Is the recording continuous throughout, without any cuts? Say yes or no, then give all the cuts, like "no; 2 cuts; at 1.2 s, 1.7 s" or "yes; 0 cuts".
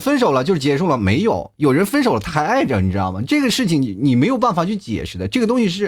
yes; 0 cuts